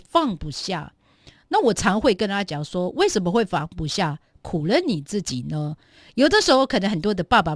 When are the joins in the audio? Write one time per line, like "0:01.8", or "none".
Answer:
none